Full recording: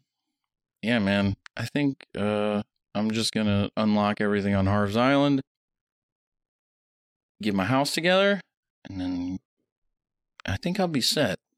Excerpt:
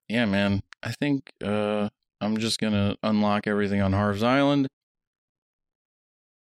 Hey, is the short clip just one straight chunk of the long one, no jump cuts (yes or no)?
yes